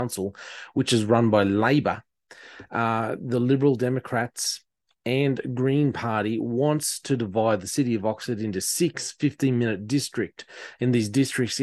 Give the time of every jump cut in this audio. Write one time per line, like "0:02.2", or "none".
none